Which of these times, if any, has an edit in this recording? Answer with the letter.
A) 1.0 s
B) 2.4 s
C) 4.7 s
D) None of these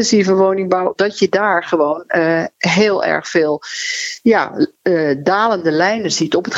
A